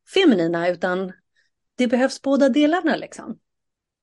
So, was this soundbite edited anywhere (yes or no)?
no